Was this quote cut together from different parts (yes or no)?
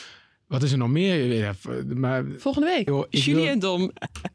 yes